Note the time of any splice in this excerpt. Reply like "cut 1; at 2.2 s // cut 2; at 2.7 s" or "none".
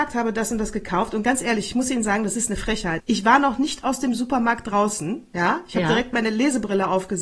cut 1; at 3.0 s

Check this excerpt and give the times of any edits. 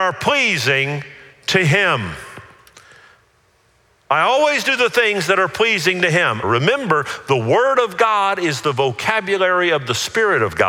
cut 1; at 6.4 s

